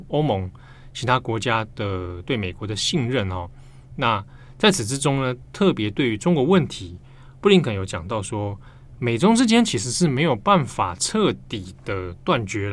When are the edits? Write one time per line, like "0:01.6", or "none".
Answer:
none

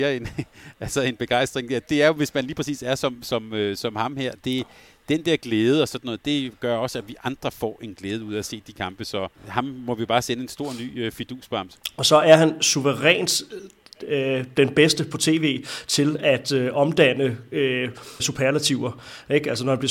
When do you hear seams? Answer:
0:09.4
0:18.2

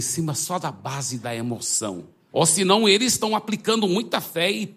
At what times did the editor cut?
0:02.3

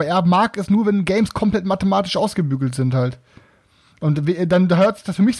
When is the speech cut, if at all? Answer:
none

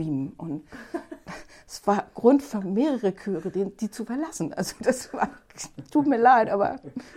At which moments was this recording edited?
none

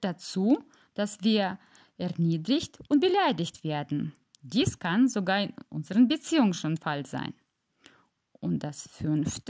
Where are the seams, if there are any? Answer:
none

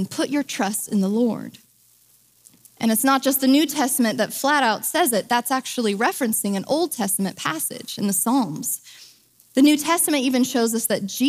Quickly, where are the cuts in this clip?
0:02.7
0:09.4

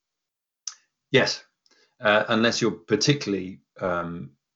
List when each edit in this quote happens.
none

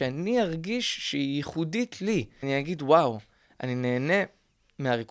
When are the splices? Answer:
0:02.4

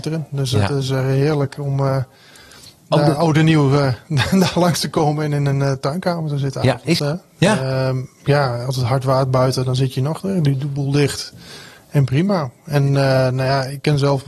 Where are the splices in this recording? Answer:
0:07.0

